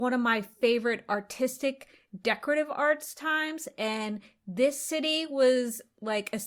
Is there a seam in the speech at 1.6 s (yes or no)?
no